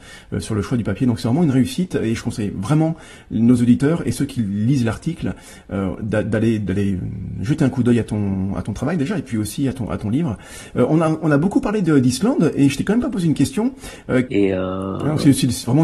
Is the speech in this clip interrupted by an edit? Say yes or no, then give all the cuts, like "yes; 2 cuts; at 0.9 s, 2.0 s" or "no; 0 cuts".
yes; 1 cut; at 14.3 s